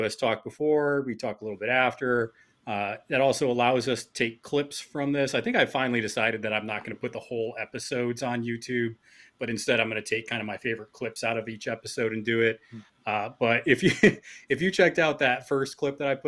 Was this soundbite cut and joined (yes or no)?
yes